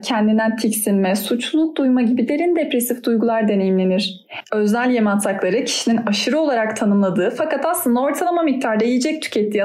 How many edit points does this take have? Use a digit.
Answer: 1